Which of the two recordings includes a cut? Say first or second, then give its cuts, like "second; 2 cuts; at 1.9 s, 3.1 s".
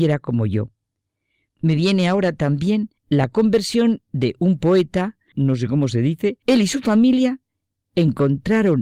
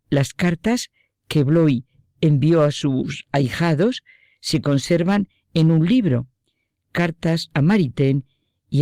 first; 3 cuts; at 3.0 s, 5.3 s, 6.4 s